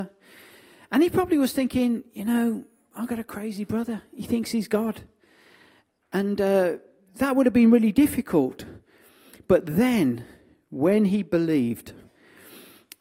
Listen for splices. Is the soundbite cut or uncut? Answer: uncut